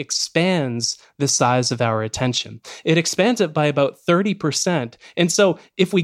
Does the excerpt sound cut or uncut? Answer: uncut